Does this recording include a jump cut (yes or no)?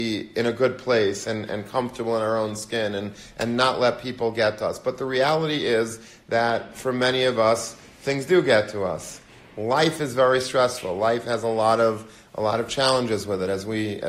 no